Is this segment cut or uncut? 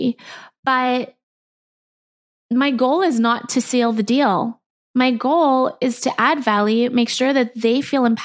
uncut